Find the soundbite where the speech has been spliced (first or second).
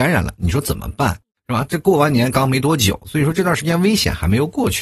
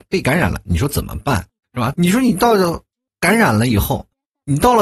second